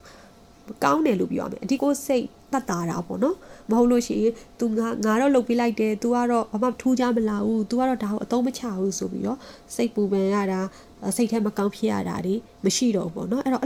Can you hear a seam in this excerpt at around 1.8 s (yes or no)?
yes